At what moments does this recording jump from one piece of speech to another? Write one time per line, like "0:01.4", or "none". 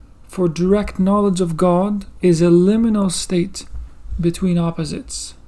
0:02.2